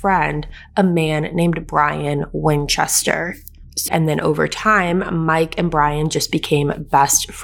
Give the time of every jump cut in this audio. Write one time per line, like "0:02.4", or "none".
0:03.9